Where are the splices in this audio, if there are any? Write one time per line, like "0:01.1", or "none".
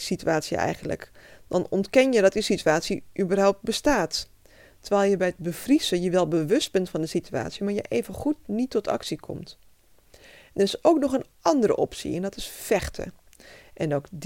none